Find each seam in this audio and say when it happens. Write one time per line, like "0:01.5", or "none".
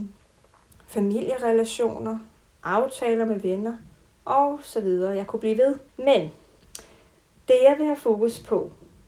0:05.9